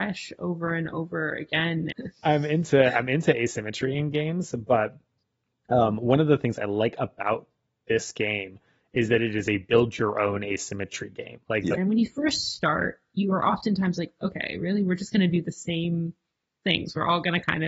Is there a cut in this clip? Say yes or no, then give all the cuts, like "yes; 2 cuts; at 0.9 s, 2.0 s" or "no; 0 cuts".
yes; 2 cuts; at 1.9 s, 11.8 s